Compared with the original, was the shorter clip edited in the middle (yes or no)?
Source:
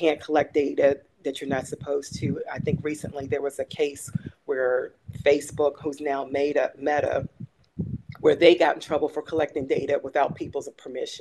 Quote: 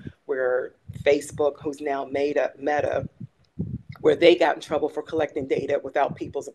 no